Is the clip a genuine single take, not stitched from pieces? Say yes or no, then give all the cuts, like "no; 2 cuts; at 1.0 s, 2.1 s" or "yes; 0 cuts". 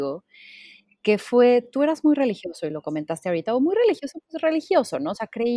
yes; 0 cuts